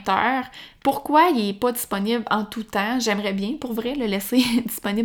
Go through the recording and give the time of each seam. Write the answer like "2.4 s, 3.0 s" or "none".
none

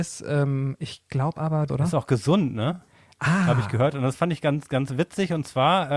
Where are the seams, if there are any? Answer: 1.7 s

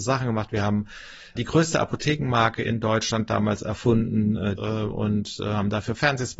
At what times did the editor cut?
1.4 s, 4.6 s

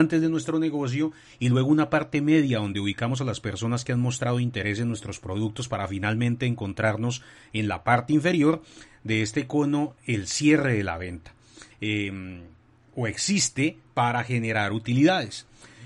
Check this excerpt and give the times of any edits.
11.7 s

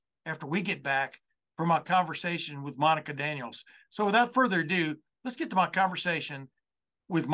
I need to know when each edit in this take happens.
none

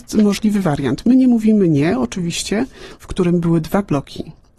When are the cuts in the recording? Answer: 3.0 s

